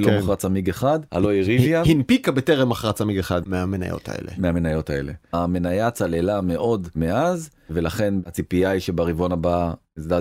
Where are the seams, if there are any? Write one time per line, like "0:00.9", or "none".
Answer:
0:01.1
0:03.4